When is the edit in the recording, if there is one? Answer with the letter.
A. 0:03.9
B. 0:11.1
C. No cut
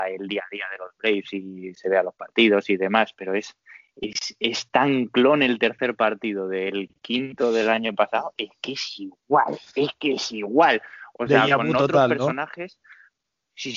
C